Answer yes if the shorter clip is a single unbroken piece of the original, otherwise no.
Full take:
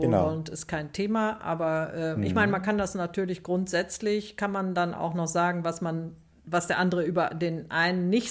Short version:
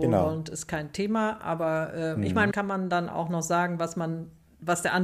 no